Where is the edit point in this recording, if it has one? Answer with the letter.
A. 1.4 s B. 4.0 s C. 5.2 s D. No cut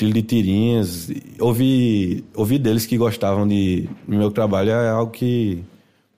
A